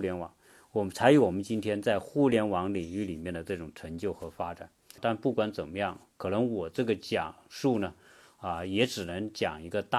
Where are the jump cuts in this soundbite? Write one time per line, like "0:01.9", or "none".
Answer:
0:05.0